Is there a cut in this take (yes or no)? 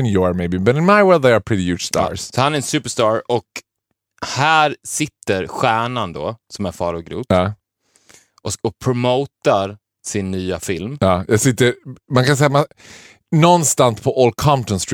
no